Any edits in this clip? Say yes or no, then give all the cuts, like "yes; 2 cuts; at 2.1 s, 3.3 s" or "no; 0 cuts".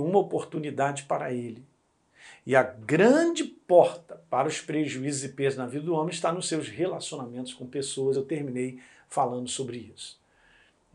no; 0 cuts